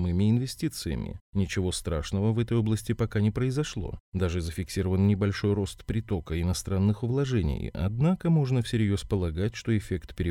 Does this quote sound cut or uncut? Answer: uncut